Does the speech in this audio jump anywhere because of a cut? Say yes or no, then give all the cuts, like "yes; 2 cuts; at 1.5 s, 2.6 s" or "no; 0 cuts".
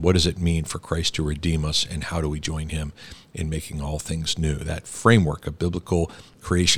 no; 0 cuts